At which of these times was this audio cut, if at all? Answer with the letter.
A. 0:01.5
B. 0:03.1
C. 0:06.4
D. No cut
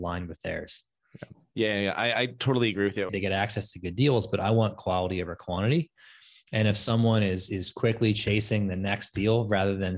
B